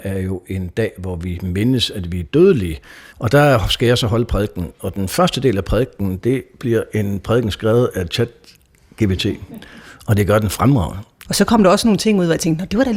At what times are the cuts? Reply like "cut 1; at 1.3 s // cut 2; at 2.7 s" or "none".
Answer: cut 1; at 3.1 s // cut 2; at 11.3 s

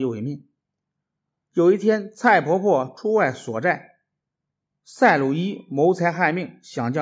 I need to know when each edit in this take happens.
none

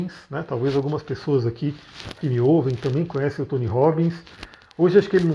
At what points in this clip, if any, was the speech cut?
none

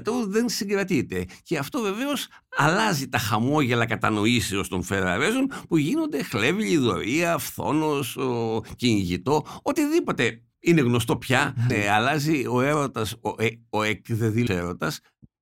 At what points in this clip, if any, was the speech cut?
cut 1; at 11.7 s // cut 2; at 14.5 s

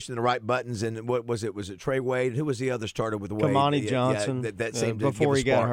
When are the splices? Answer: none

